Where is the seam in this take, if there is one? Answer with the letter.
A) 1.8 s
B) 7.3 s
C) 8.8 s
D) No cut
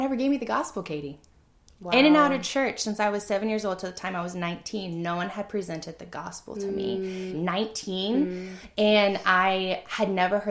B